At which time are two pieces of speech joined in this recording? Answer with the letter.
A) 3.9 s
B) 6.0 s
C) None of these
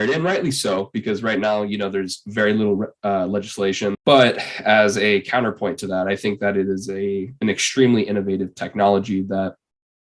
A